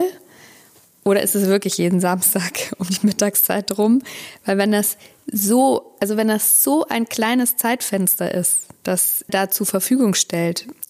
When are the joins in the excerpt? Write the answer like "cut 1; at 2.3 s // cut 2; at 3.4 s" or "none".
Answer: cut 1; at 9.3 s